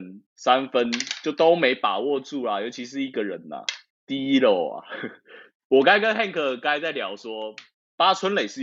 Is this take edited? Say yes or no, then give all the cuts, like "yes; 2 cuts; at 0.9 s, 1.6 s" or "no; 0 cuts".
no; 0 cuts